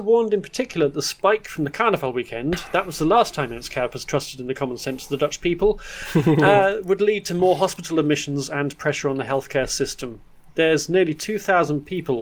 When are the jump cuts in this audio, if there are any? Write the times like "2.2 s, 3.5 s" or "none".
none